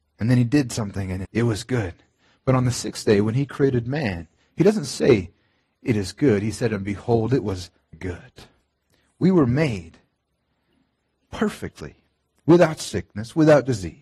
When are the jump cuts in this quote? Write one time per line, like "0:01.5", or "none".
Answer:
0:01.2
0:07.9